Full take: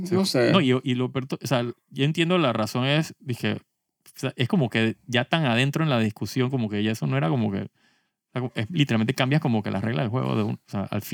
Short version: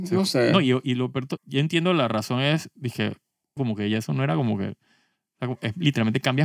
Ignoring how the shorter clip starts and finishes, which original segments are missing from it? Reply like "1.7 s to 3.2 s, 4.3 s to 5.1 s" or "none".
1.4 s to 1.8 s, 4.0 s to 6.5 s